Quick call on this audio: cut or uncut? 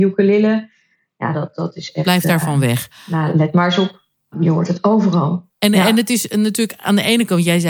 uncut